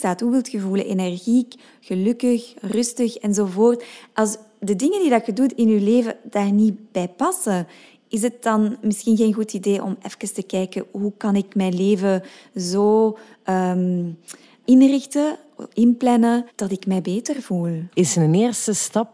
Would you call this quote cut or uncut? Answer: cut